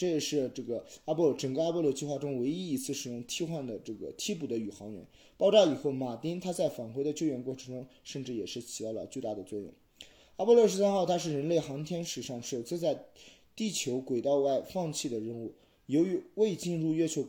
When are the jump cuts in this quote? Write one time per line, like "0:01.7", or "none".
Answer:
none